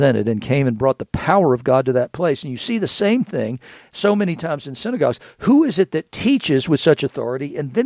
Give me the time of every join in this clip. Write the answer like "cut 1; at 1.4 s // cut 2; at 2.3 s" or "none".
none